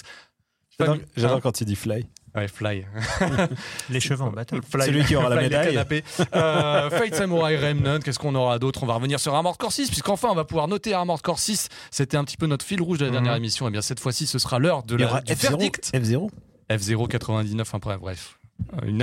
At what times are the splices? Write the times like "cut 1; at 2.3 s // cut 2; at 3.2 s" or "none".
none